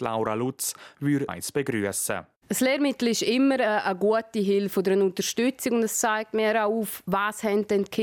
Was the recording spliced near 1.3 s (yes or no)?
yes